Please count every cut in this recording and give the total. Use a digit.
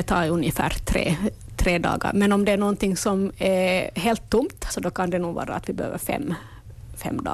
1